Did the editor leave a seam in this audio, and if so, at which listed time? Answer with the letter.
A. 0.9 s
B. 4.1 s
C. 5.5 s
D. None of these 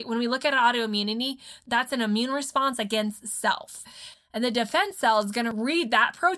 B